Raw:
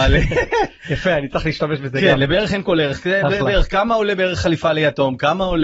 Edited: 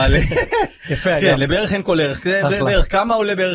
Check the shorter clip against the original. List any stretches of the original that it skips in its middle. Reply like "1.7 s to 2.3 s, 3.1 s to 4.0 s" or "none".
1.2 s to 2.0 s